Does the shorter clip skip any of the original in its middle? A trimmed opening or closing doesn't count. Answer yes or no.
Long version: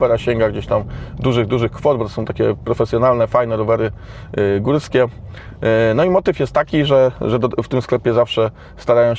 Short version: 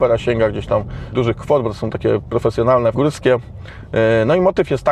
yes